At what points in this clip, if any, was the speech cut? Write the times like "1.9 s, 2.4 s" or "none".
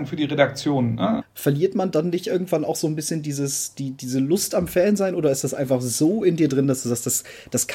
1.2 s